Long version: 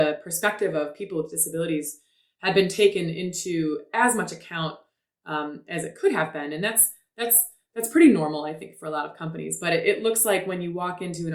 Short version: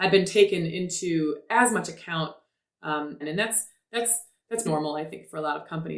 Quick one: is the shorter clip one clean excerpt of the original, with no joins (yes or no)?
no